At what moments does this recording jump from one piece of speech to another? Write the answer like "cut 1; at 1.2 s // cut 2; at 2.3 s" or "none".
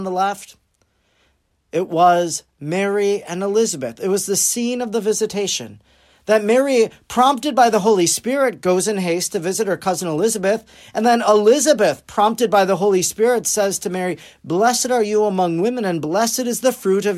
none